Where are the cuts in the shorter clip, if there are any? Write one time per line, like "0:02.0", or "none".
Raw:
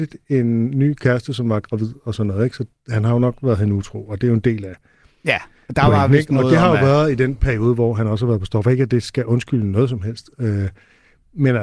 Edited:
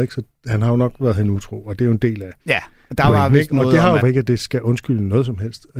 0:02.4
0:04.0